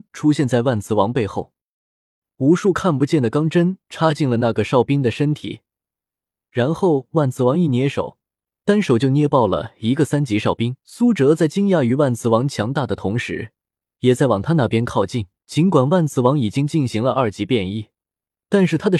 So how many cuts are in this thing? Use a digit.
3